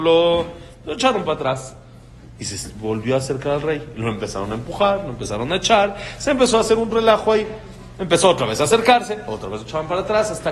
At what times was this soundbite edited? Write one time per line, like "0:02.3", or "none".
0:02.4